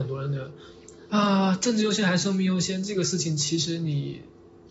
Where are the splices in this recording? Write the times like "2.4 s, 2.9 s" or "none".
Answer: 1.0 s